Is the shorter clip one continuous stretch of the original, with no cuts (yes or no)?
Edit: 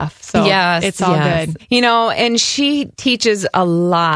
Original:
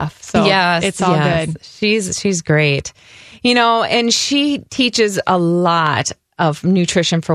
no